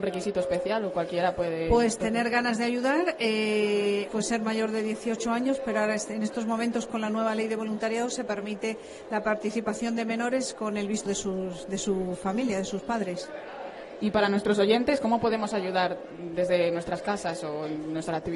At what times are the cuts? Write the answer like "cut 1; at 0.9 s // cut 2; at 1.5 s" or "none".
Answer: cut 1; at 4.1 s // cut 2; at 11.1 s